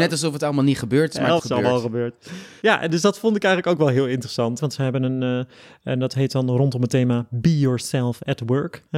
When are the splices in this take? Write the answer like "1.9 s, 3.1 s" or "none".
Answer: 1.4 s, 4.6 s

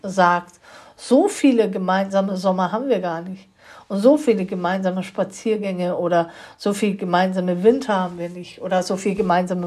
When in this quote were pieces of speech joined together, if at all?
none

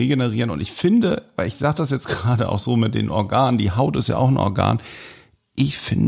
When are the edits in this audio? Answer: none

